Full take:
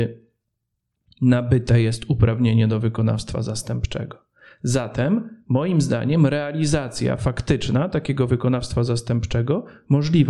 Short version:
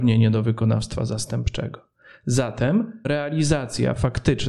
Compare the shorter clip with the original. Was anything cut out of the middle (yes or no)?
yes